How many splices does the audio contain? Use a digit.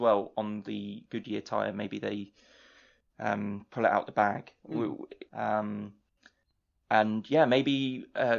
1